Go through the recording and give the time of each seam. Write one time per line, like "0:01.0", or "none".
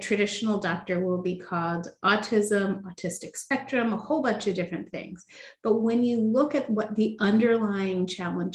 none